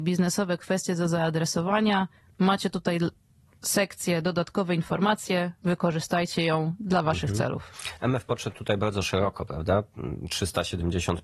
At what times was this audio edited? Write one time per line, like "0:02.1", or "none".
none